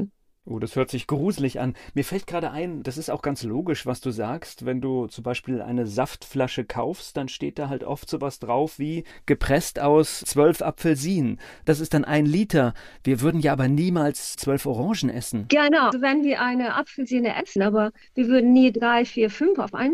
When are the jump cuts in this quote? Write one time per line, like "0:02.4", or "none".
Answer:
0:15.9
0:17.6